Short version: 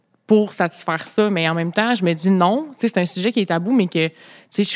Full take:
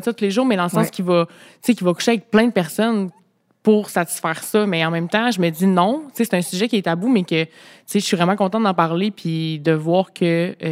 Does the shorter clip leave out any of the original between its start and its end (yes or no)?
no